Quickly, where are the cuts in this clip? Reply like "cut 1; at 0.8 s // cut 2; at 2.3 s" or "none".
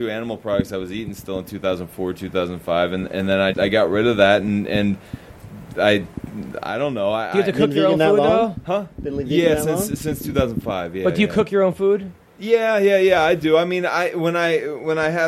cut 1; at 3.5 s

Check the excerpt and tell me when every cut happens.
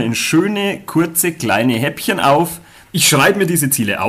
cut 1; at 2.8 s

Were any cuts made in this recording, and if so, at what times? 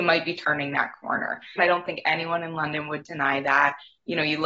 cut 1; at 1.6 s

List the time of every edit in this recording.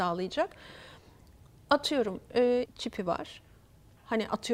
cut 1; at 2.7 s

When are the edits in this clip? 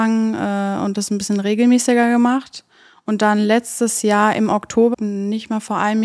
cut 1; at 4.9 s

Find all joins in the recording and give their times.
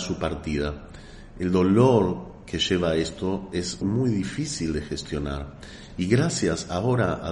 cut 1; at 3.8 s // cut 2; at 5.9 s

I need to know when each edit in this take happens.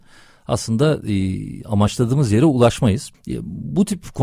cut 1; at 3.1 s

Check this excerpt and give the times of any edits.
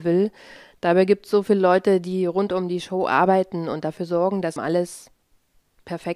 cut 1; at 4.6 s

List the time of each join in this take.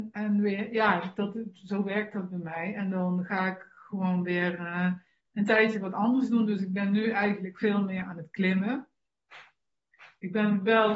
none

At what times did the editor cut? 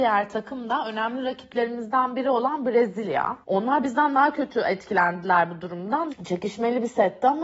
cut 1; at 3.4 s // cut 2; at 6.1 s

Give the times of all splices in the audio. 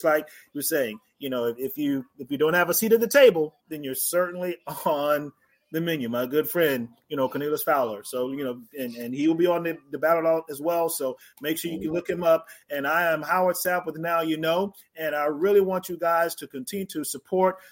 cut 1; at 3.6 s

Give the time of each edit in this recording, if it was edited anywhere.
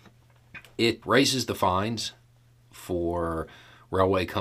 cut 1; at 1.0 s

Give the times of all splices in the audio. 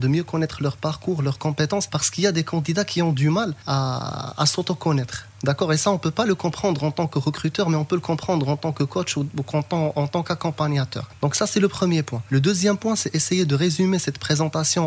none

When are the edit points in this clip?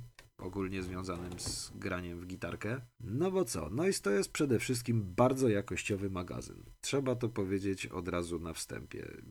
none

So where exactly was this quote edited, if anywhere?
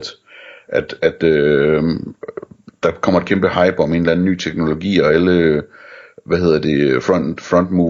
none

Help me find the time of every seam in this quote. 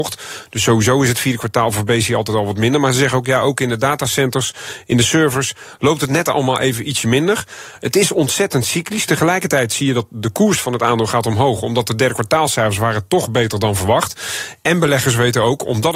none

